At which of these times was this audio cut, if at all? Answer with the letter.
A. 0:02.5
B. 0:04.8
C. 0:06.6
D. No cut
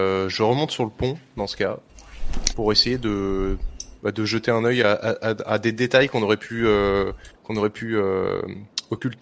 A